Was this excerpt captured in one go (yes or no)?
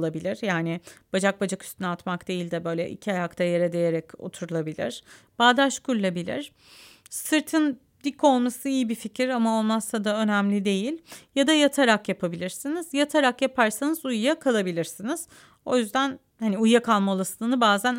yes